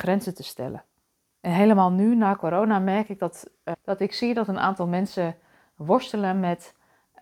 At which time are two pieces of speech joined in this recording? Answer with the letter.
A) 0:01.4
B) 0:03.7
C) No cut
B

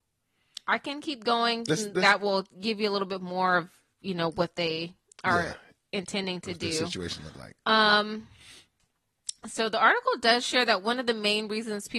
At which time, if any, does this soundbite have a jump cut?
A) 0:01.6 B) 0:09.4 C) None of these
C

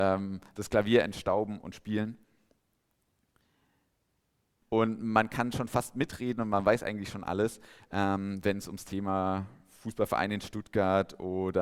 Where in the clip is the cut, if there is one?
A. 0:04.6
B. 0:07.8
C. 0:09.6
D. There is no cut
A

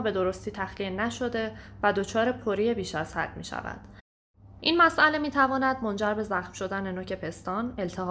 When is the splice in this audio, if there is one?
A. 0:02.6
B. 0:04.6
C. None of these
B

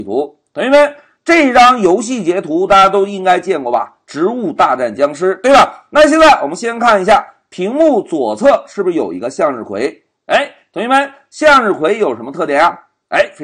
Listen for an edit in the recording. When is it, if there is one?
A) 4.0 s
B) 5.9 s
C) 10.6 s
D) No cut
D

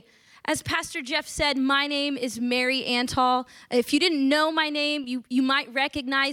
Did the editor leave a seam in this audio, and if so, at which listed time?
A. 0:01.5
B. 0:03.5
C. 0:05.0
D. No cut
D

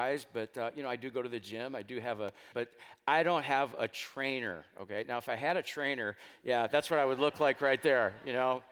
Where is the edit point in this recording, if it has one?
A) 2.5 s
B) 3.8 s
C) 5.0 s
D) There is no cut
A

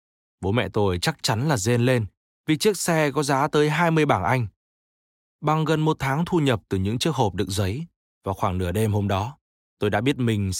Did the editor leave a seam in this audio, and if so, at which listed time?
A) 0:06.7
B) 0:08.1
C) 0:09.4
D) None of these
B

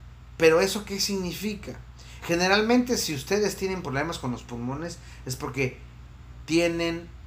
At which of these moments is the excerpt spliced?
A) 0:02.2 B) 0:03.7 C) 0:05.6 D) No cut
A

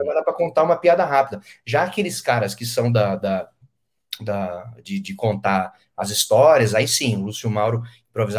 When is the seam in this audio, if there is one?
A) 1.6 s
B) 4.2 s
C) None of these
C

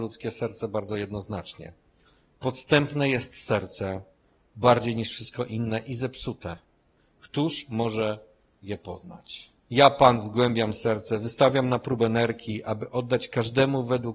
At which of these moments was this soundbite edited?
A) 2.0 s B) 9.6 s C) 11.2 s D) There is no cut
B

